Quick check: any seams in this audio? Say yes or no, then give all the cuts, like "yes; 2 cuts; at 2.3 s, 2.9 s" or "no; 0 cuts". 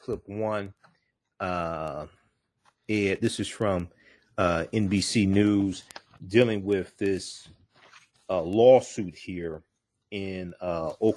no; 0 cuts